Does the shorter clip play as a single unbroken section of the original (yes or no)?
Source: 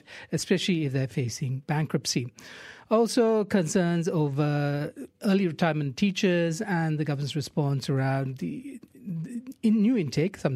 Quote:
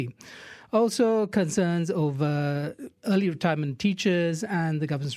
yes